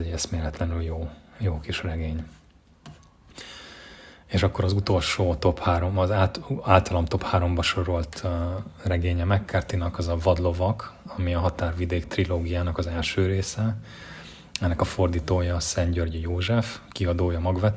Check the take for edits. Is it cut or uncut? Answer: uncut